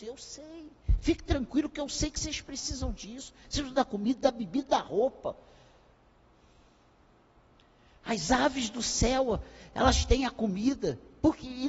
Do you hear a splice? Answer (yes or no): no